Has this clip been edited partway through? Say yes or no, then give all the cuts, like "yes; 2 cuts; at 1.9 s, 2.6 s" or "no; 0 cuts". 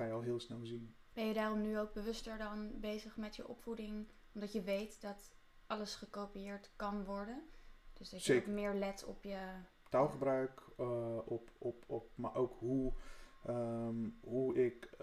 yes; 1 cut; at 1.1 s